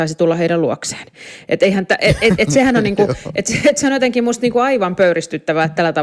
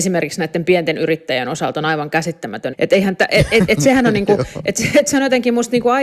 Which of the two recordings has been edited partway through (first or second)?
second